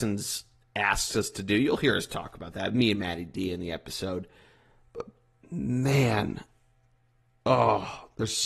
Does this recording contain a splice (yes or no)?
no